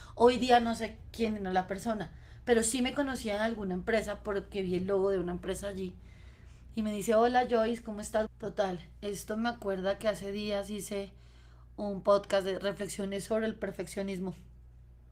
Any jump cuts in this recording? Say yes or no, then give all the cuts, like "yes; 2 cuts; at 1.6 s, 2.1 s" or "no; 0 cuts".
yes; 1 cut; at 8.3 s